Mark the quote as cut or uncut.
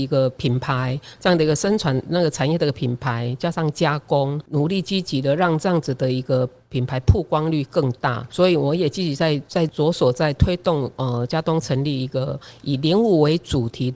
uncut